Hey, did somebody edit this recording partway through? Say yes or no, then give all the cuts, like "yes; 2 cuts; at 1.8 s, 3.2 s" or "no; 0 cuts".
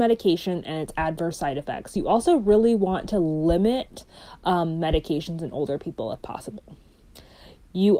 no; 0 cuts